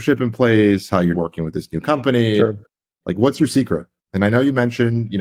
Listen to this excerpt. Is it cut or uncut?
cut